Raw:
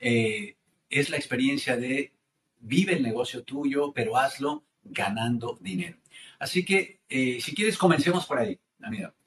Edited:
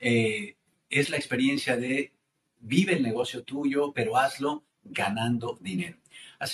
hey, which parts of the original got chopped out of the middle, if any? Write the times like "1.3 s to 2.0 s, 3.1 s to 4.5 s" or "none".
none